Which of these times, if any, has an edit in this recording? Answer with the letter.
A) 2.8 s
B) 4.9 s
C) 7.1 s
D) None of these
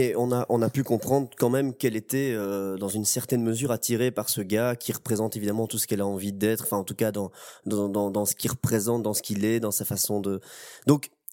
D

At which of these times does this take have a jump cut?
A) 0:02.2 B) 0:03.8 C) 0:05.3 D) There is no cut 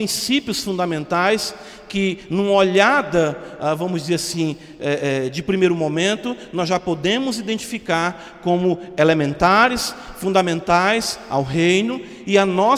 D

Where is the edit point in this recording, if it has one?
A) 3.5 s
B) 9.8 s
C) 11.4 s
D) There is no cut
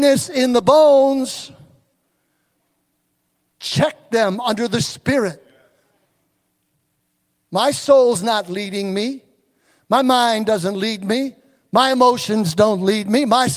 A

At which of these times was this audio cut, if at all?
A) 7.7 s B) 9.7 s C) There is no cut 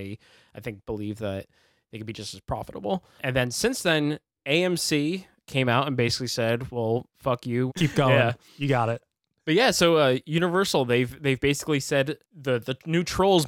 A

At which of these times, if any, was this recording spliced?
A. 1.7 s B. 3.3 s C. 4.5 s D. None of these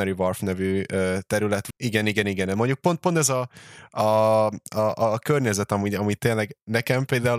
A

